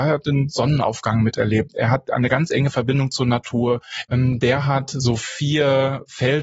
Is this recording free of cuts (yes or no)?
no